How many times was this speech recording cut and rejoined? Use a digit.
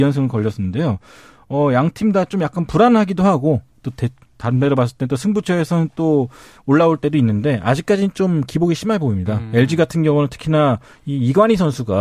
0